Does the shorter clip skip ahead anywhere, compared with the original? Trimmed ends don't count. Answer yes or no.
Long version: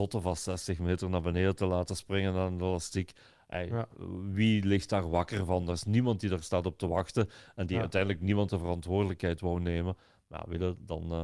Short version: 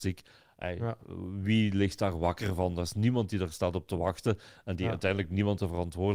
no